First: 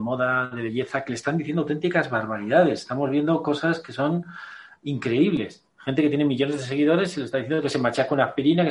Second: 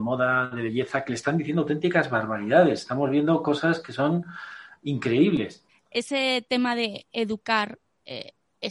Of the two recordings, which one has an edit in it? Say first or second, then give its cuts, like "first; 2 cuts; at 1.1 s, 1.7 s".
second; 1 cut; at 5.7 s